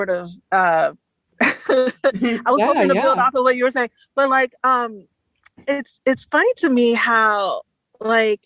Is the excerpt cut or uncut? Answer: cut